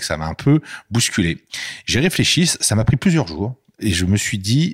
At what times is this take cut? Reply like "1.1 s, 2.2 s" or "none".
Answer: none